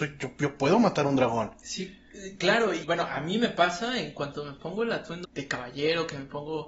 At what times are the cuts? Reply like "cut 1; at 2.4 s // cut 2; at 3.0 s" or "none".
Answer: cut 1; at 1.6 s // cut 2; at 2.8 s // cut 3; at 5.2 s